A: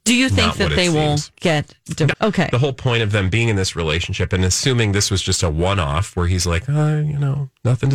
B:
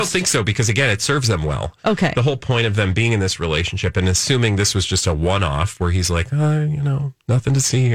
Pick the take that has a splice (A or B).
A